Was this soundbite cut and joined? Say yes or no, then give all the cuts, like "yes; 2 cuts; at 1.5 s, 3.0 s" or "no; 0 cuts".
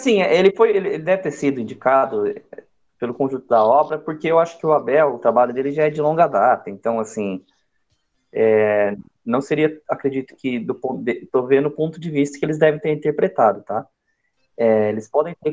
no; 0 cuts